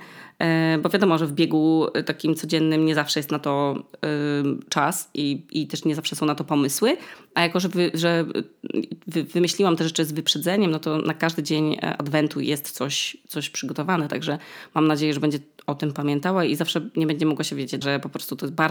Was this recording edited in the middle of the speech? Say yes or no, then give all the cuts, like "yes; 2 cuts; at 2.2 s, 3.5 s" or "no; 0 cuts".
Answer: yes; 1 cut; at 17.8 s